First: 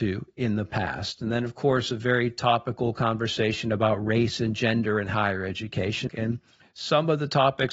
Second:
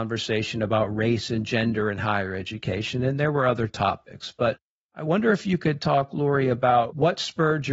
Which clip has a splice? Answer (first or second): first